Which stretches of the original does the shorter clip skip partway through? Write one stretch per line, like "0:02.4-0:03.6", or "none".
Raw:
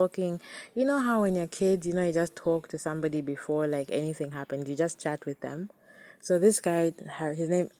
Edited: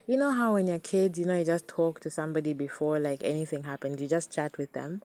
none